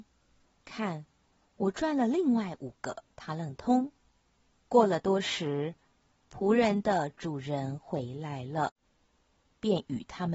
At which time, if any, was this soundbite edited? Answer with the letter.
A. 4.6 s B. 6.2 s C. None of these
A